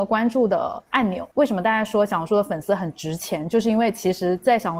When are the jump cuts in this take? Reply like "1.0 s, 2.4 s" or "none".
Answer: 1.3 s

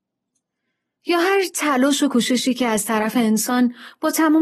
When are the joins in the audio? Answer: none

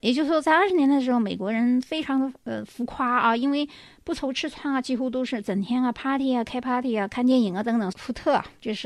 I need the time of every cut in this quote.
7.9 s

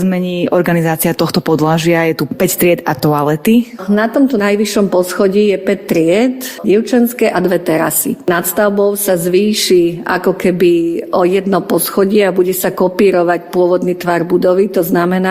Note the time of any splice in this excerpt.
6.6 s

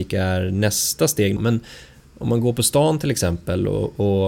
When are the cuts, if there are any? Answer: 1.4 s

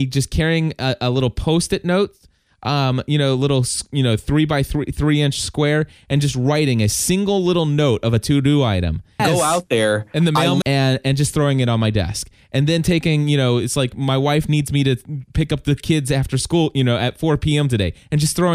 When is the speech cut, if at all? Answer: 9.2 s, 10.6 s

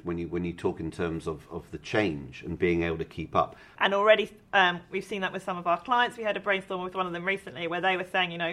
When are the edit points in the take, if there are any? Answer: 3.8 s

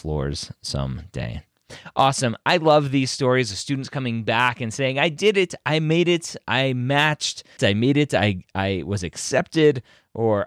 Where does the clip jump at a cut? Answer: 7.6 s

